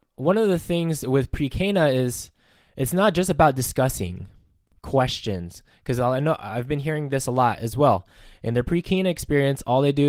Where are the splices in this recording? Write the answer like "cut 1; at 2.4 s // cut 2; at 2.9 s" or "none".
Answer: none